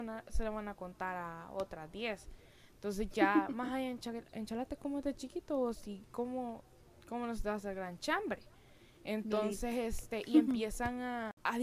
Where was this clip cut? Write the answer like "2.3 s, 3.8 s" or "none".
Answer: none